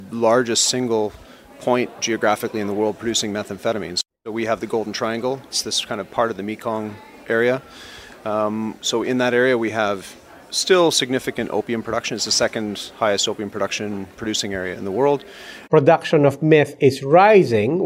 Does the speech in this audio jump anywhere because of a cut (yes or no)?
yes